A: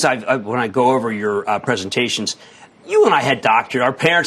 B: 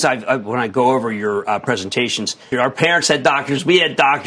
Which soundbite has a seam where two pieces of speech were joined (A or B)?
B